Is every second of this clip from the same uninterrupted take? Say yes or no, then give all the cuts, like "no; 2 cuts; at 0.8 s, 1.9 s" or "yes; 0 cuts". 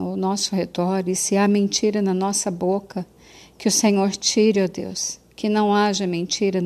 yes; 0 cuts